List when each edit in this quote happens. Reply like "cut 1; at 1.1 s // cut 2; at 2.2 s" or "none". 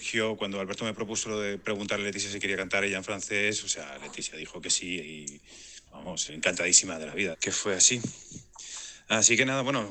cut 1; at 6.3 s // cut 2; at 7.3 s